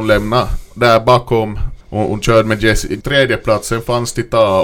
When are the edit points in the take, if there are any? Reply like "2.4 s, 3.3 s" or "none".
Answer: 1.8 s, 3.0 s